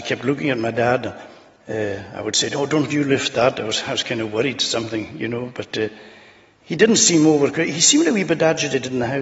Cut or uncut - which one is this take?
uncut